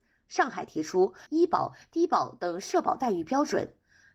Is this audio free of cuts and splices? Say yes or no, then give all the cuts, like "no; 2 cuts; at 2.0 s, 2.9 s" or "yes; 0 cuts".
no; 1 cut; at 1.3 s